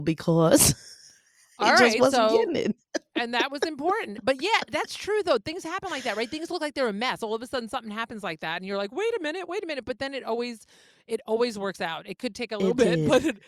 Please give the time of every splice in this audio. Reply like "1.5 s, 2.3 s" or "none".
none